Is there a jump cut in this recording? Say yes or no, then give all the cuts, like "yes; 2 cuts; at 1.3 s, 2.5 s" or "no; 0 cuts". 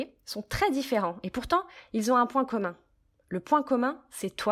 no; 0 cuts